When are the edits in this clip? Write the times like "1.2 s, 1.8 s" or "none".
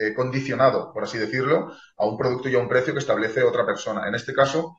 none